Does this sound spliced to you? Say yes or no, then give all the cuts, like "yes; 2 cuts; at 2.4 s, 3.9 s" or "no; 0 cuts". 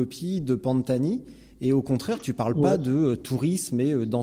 no; 0 cuts